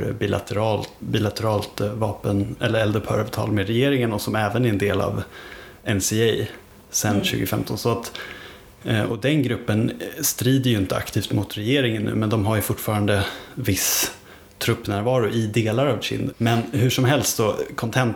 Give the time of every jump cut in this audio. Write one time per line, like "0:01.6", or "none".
0:01.0
0:16.3